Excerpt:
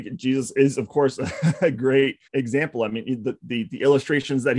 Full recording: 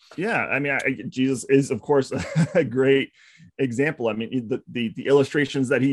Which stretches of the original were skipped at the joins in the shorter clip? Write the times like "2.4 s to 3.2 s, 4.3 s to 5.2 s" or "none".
3.2 s to 3.5 s